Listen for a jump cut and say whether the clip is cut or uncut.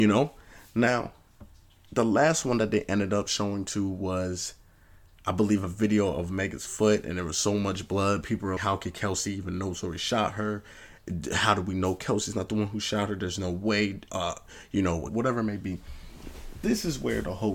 cut